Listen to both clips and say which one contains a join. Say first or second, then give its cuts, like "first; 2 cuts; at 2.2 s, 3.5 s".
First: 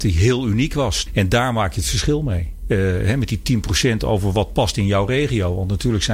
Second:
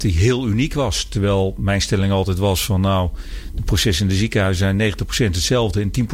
first; 1 cut; at 1.1 s